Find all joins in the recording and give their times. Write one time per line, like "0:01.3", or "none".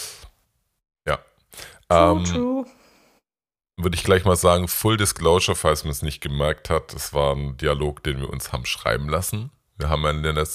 none